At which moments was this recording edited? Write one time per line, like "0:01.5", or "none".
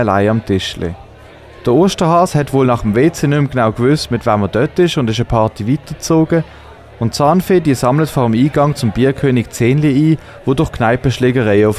none